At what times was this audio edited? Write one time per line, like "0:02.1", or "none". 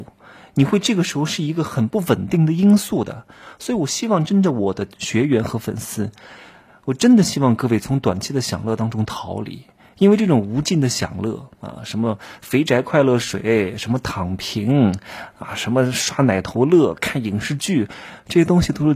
none